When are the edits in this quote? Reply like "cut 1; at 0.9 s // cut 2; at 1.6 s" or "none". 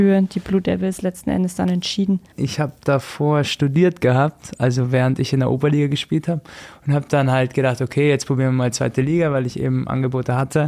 cut 1; at 2.3 s